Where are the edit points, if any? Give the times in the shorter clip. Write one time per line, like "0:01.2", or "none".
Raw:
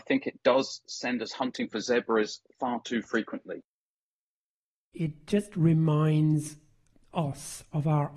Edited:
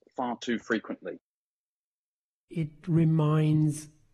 0:02.8